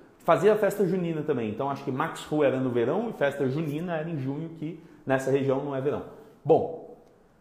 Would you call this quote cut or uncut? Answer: uncut